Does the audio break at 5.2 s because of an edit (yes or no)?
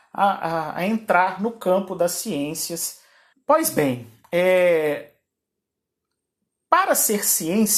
no